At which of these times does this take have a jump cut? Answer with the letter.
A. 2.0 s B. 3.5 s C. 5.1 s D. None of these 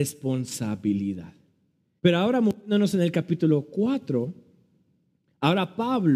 A